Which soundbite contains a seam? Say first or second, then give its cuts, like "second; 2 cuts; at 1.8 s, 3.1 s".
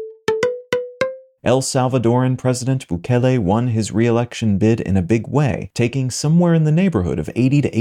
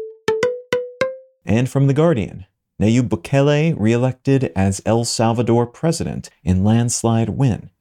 first; 1 cut; at 1.4 s